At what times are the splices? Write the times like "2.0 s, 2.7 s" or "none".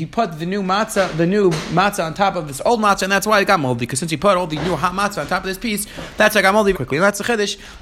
6.7 s